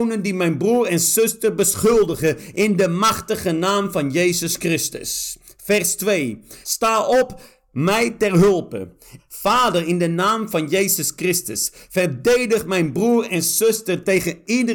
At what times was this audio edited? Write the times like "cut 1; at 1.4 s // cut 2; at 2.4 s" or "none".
cut 1; at 6.6 s // cut 2; at 9.2 s